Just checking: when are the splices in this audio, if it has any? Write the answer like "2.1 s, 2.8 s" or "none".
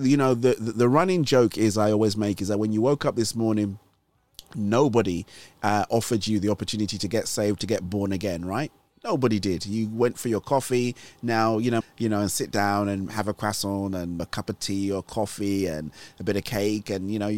11.8 s, 14.2 s